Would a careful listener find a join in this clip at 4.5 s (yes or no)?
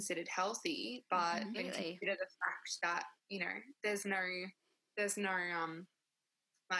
no